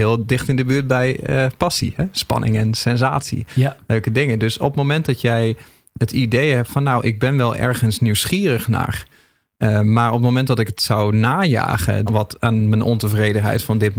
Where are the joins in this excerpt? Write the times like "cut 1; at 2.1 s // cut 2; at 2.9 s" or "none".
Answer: cut 1; at 12.1 s